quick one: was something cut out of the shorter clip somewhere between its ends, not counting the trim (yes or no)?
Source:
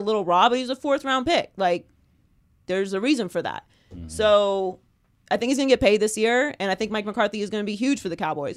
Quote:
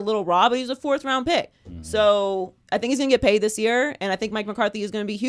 yes